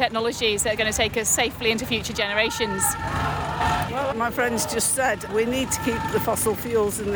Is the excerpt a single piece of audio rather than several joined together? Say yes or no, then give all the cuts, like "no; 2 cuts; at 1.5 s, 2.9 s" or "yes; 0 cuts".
no; 2 cuts; at 4.1 s, 5.3 s